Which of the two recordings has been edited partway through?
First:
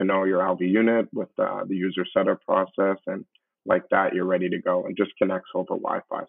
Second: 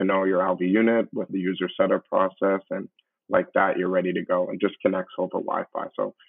second; 1 cut; at 1.3 s

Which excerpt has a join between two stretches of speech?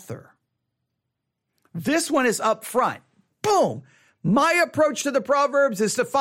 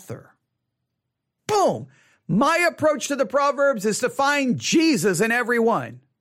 second; 1 cut; at 1.4 s

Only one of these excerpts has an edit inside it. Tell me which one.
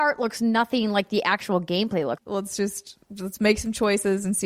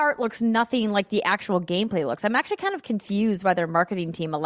first; 1 cut; at 2.2 s

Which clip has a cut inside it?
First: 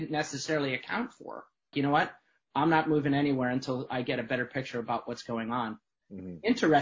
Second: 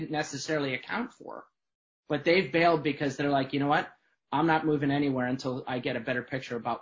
first; 1 cut; at 1.7 s

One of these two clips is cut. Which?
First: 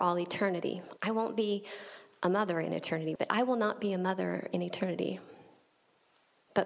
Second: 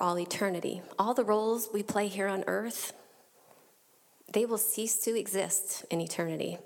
first; 2 cuts; at 1.0 s, 3.2 s

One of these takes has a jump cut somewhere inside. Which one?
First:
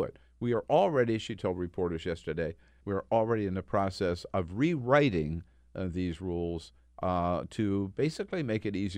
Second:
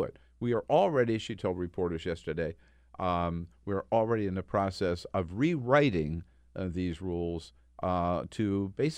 first; 1 cut; at 2.8 s

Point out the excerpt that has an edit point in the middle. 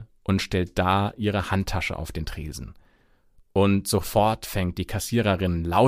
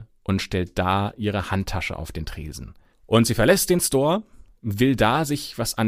second; 2 cuts; at 2.9 s, 4.6 s

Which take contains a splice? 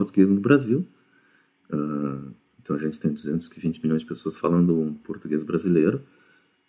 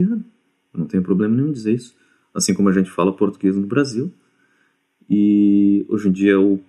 first; 1 cut; at 1.6 s

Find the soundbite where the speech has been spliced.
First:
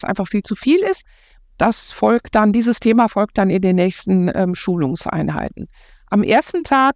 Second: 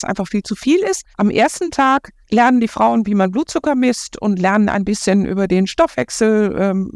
second; 2 cuts; at 1.1 s, 2.2 s

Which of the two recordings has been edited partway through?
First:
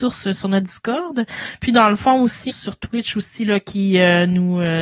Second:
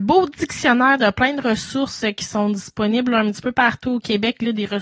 first; 1 cut; at 2.5 s

